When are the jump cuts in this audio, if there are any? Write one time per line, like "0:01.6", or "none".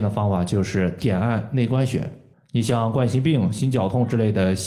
0:02.3